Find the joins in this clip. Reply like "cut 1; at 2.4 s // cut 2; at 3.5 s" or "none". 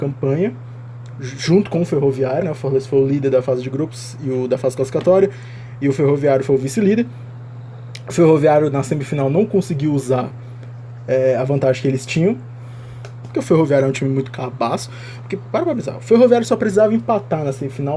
cut 1; at 2.4 s